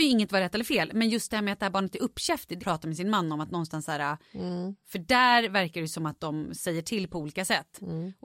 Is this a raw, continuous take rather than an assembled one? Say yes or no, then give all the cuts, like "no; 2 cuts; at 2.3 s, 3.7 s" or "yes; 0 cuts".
no; 1 cut; at 2.6 s